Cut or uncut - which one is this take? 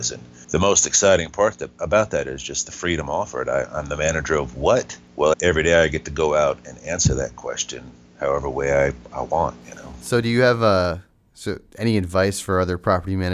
cut